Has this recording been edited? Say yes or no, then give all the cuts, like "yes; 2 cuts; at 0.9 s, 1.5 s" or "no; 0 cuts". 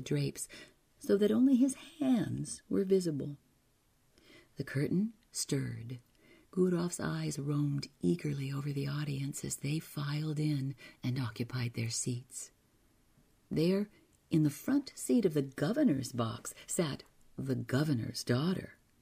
yes; 2 cuts; at 6.4 s, 13.4 s